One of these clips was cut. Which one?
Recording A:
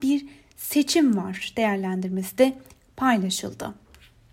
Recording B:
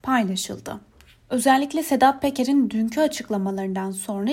B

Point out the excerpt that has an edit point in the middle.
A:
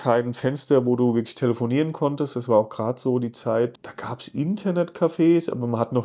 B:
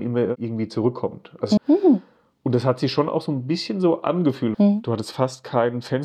B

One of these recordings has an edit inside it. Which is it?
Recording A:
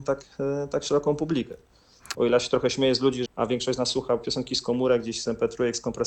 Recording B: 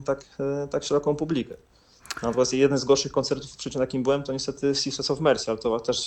A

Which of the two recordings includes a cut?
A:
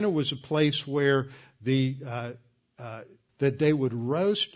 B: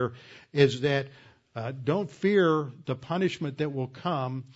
A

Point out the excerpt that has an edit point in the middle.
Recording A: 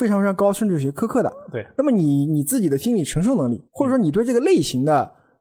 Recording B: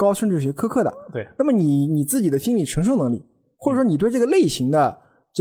A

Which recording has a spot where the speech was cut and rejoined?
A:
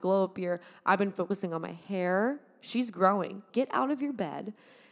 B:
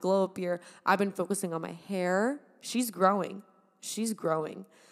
A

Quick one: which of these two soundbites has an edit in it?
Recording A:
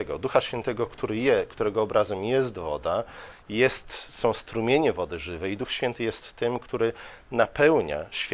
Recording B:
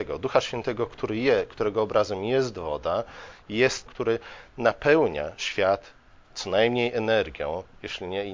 B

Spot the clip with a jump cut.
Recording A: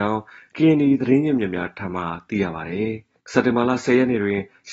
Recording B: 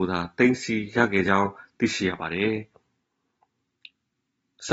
A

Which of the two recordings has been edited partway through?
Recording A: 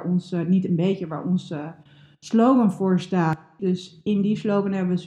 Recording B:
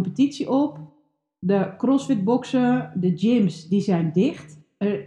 A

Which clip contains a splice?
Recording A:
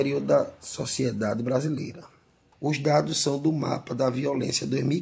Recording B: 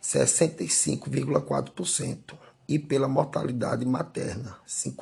A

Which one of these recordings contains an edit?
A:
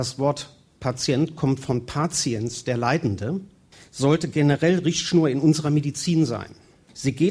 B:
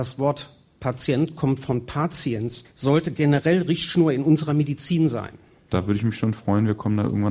B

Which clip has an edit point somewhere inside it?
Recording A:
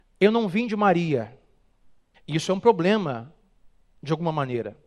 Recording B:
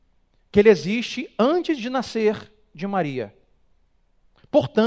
A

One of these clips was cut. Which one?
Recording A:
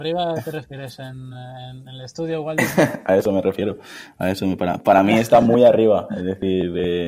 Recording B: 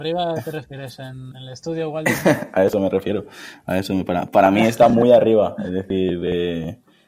B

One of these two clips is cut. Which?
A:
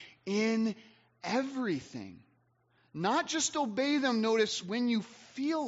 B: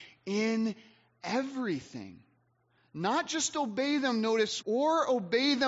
B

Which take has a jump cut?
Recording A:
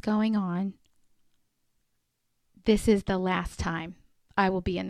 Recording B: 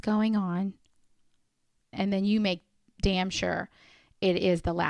B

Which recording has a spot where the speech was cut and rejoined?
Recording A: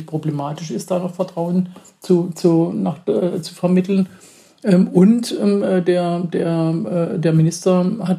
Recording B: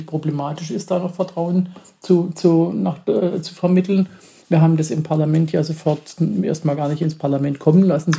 B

